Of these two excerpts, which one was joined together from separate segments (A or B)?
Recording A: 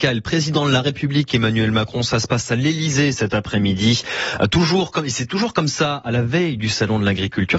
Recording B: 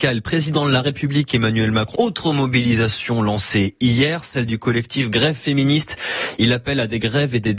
B